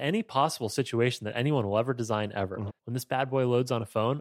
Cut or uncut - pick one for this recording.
cut